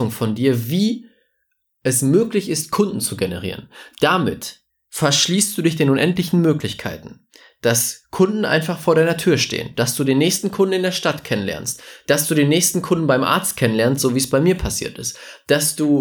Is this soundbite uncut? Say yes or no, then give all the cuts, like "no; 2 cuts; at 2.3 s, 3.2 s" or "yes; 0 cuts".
yes; 0 cuts